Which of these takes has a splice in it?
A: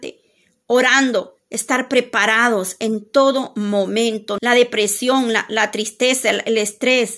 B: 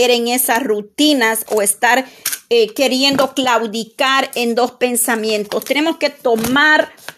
A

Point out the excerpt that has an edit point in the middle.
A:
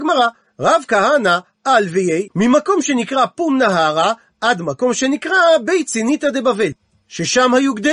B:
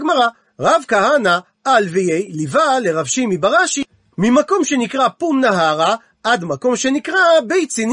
A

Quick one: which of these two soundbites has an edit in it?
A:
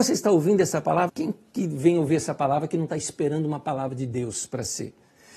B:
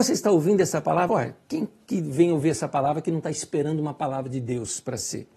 A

